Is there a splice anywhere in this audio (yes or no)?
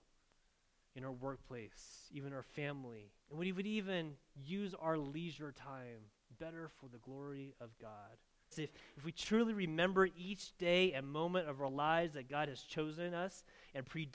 yes